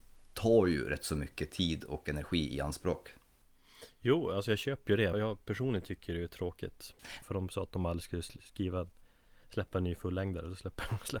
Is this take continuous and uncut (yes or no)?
no